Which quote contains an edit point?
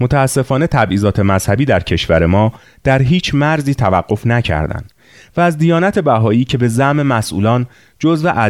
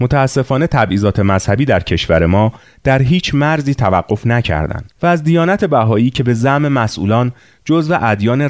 second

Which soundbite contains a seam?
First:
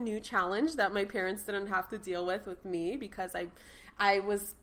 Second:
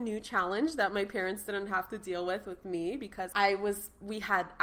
second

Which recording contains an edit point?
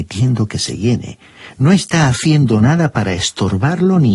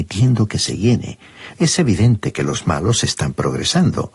second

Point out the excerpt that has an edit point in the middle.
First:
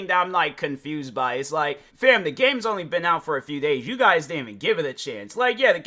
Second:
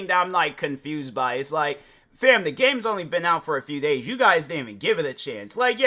first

